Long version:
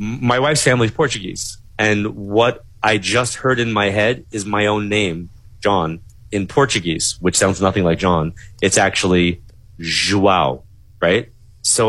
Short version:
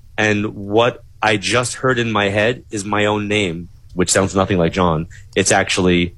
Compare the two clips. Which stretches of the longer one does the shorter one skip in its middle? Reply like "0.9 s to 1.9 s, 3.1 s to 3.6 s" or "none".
5.5 s to 7.2 s